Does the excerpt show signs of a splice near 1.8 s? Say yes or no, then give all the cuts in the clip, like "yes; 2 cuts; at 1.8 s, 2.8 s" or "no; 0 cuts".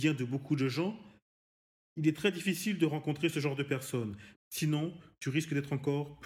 no; 1 cut; at 4.3 s